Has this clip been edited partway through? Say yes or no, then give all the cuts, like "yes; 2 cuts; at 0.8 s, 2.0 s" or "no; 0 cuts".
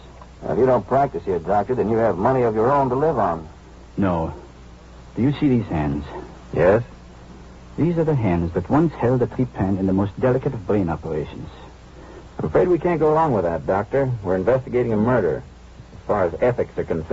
yes; 1 cut; at 12.3 s